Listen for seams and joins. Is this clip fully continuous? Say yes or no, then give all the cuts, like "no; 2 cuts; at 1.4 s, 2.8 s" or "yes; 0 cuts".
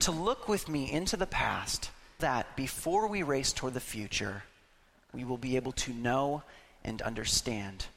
no; 1 cut; at 2.2 s